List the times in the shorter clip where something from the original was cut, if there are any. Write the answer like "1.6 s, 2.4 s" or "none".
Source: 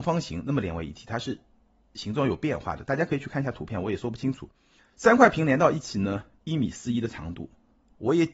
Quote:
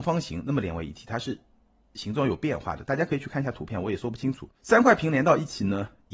4.6 s